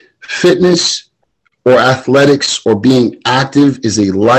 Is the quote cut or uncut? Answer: uncut